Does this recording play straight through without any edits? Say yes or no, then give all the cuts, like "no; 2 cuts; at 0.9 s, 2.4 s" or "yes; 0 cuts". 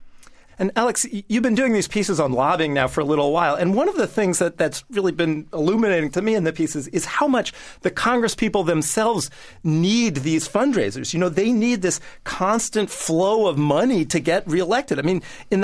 yes; 0 cuts